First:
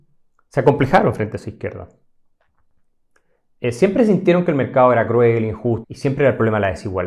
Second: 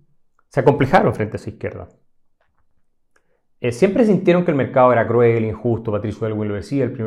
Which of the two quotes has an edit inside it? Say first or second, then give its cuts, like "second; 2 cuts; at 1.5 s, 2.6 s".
first; 1 cut; at 5.8 s